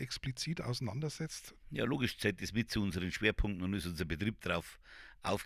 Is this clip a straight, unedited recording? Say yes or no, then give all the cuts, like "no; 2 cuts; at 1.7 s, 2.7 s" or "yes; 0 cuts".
no; 1 cut; at 1.6 s